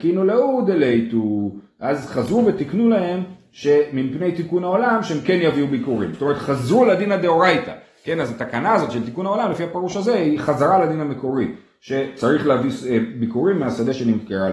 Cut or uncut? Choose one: uncut